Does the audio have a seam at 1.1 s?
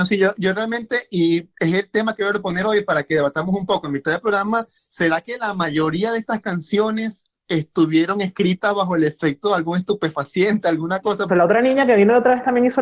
no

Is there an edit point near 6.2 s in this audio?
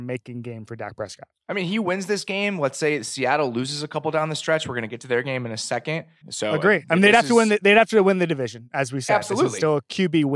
yes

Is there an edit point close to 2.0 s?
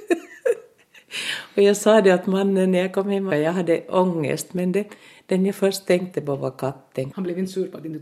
no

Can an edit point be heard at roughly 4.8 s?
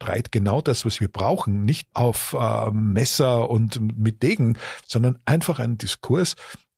no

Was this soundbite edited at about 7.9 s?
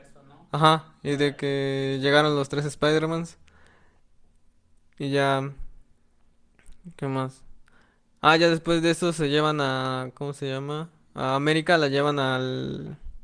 no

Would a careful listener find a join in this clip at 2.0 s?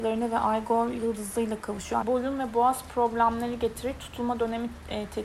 yes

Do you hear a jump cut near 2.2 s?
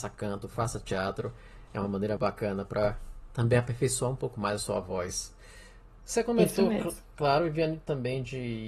yes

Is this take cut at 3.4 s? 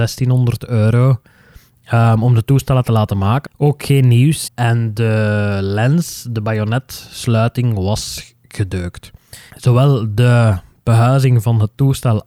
yes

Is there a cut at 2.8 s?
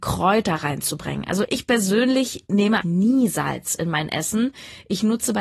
yes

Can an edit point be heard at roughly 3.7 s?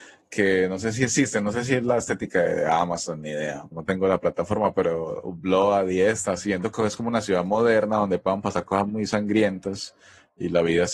yes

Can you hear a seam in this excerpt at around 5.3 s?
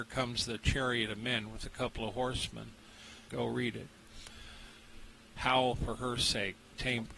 yes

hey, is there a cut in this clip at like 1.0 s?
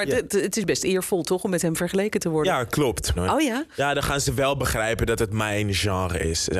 no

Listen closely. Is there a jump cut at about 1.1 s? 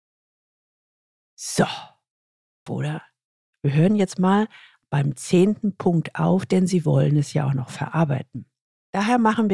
no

